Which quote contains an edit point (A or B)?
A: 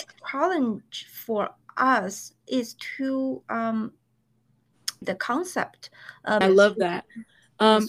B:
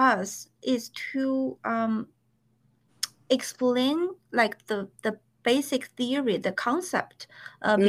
A